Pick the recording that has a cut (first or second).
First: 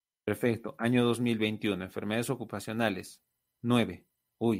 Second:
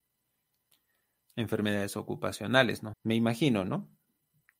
second